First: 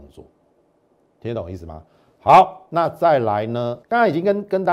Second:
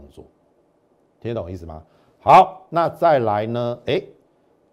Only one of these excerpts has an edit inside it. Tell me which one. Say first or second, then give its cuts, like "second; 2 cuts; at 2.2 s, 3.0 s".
first; 1 cut; at 3.8 s